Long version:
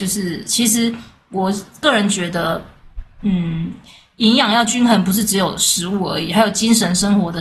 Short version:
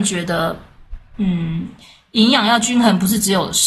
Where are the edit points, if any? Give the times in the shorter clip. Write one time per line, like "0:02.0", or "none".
none